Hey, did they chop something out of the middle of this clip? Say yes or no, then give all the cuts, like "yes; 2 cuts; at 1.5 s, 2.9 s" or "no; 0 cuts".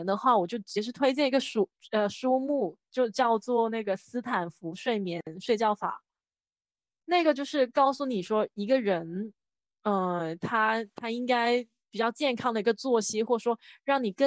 no; 0 cuts